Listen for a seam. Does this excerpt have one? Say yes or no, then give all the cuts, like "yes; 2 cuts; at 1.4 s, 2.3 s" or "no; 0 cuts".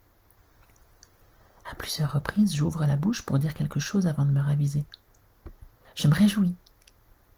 yes; 1 cut; at 5.8 s